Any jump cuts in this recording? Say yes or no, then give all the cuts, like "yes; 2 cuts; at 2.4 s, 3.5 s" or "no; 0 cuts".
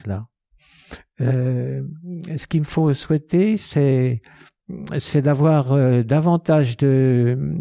no; 0 cuts